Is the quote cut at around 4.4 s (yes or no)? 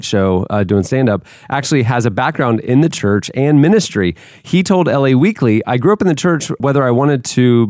no